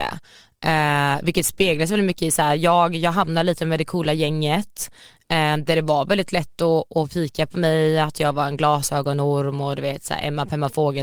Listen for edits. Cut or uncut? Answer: uncut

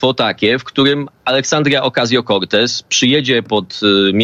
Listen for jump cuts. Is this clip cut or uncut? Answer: uncut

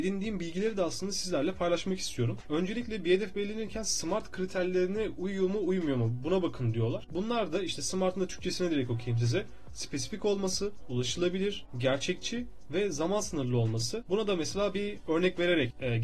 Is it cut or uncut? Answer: cut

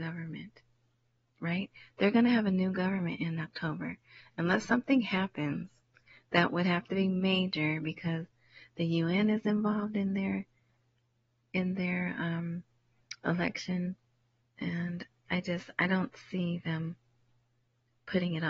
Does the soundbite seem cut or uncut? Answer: cut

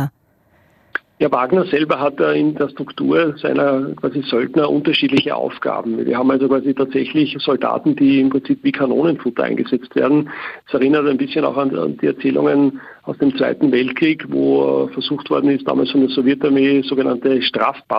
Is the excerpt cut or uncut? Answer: uncut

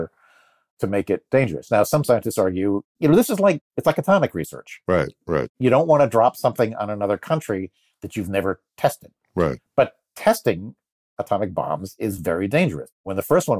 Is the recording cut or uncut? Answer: uncut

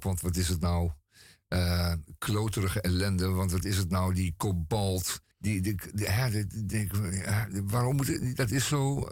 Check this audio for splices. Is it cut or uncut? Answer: cut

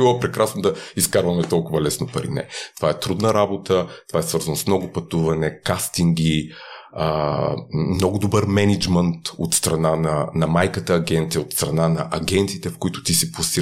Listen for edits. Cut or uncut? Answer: uncut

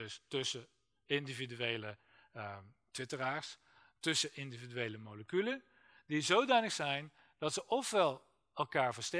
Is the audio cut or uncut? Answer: uncut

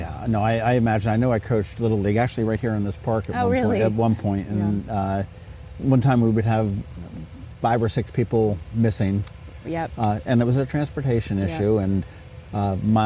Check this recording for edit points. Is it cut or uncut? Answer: uncut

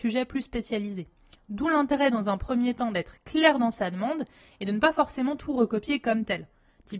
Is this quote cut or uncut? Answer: uncut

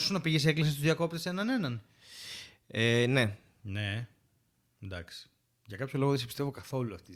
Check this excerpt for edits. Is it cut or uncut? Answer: uncut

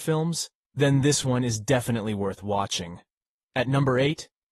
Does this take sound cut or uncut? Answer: uncut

